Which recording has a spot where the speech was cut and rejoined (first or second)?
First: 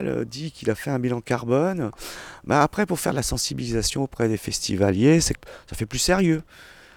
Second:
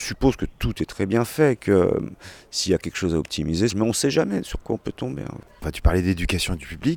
second